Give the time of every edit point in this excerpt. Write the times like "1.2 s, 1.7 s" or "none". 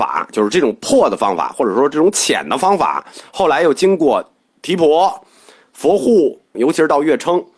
6.5 s